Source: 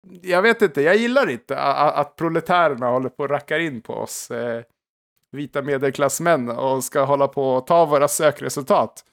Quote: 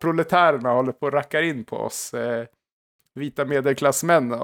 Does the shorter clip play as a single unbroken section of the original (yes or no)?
yes